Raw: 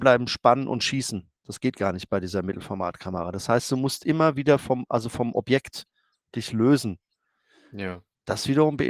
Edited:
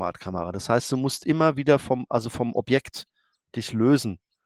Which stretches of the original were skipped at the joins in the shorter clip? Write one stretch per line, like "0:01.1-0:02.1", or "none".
none